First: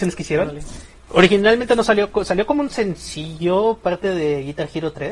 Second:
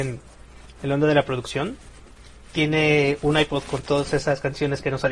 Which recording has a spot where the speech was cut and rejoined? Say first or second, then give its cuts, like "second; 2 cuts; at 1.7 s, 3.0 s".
first; 1 cut; at 0.9 s